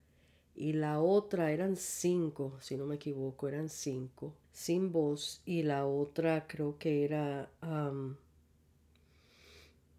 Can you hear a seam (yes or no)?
yes